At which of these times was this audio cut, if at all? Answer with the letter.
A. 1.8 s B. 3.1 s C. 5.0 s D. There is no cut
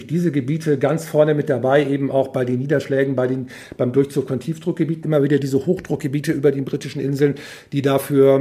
C